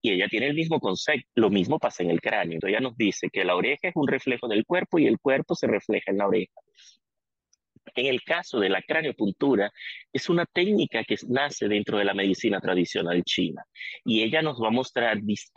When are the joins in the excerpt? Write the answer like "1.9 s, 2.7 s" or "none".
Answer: 1.3 s, 2.6 s